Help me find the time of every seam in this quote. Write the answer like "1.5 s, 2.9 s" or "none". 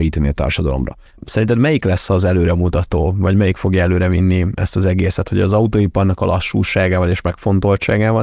1.1 s